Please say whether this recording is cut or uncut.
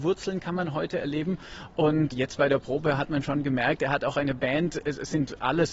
cut